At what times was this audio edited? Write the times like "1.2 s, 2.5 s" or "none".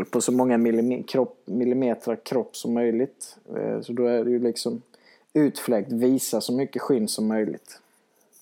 none

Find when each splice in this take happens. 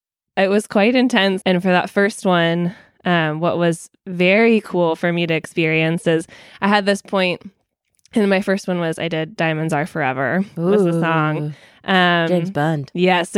1.4 s

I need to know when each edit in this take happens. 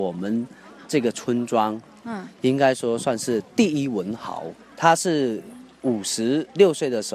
none

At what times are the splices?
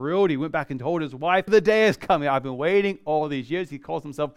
1.5 s

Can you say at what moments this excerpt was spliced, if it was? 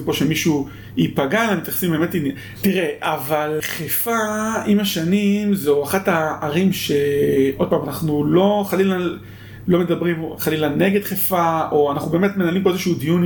2.5 s

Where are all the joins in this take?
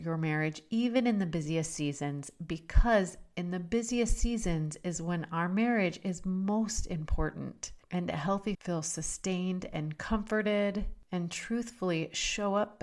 8.5 s

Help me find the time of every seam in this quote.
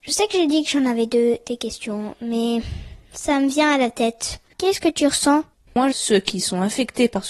4.5 s, 5.9 s

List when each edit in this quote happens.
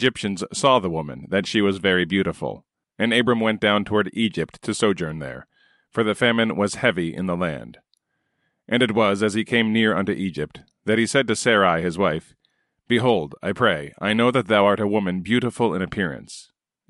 2.8 s

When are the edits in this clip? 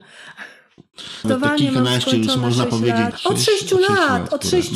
1.2 s, 3.1 s

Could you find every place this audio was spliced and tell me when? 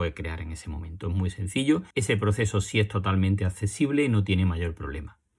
1.9 s

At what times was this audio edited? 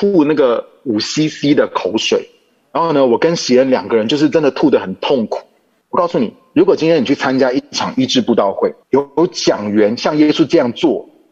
5.8 s, 8.8 s

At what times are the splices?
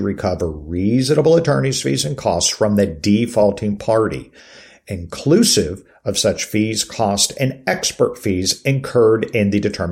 none

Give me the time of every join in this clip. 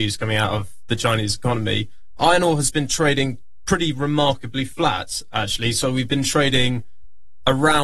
none

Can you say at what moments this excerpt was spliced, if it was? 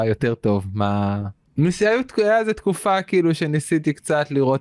1.5 s

